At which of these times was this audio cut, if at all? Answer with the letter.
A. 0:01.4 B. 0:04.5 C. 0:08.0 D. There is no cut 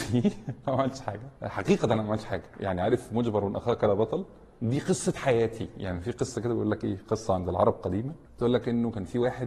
A